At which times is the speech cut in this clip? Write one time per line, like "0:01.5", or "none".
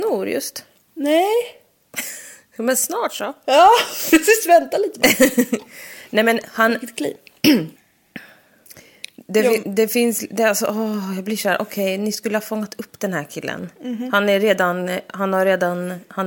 0:07.8